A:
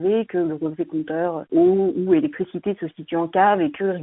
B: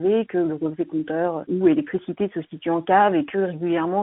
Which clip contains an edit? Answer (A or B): B